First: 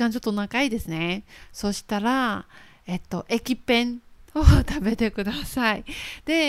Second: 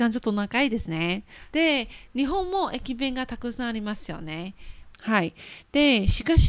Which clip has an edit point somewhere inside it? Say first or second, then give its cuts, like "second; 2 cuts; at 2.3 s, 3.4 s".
second; 2 cuts; at 1.5 s, 4.9 s